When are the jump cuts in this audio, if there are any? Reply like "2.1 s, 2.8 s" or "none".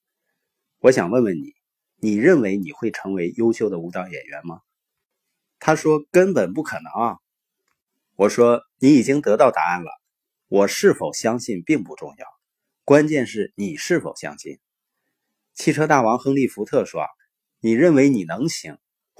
none